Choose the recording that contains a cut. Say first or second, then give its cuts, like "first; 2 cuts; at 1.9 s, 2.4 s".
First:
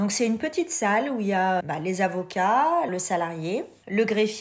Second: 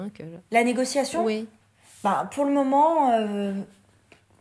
first; 2 cuts; at 1.6 s, 2.9 s